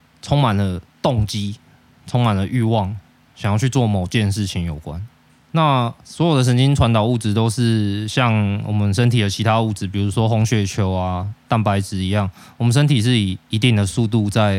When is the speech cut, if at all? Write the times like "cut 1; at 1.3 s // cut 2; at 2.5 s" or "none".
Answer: cut 1; at 5.4 s